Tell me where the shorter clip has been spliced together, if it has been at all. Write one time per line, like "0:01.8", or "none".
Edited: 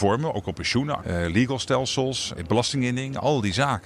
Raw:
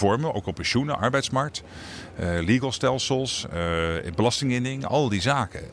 0:01.0
0:02.4